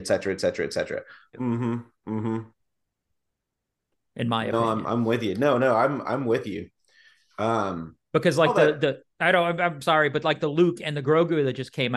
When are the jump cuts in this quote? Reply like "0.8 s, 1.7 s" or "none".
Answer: 1.3 s